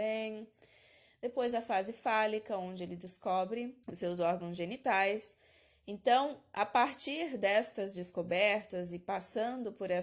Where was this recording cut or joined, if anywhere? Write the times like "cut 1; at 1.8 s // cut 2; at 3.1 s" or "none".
cut 1; at 3.8 s